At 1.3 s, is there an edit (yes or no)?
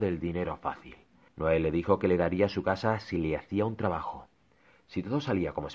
yes